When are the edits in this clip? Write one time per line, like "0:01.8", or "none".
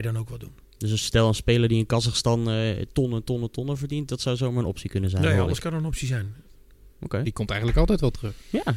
0:07.2